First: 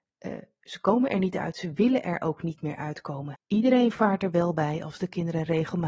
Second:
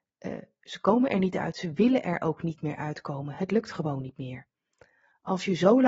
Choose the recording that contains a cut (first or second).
first